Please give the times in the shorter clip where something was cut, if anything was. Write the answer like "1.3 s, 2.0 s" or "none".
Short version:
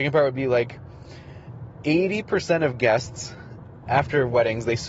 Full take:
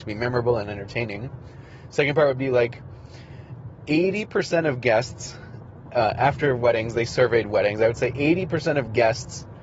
3.9 s

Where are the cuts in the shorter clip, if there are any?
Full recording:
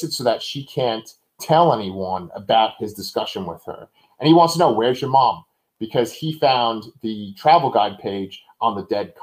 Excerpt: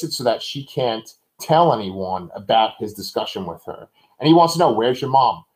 none

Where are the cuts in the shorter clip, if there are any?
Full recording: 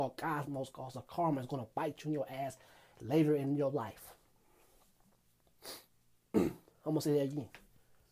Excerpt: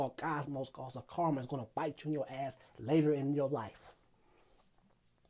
2.7 s

